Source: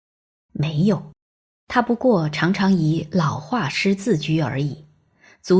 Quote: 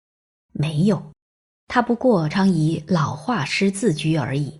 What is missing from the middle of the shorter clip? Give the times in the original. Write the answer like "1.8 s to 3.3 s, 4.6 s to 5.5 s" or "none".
2.3 s to 2.5 s